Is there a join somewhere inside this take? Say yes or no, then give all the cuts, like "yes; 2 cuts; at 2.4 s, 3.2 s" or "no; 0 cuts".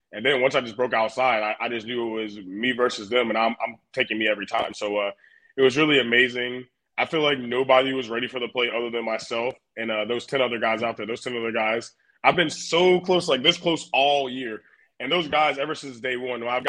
no; 0 cuts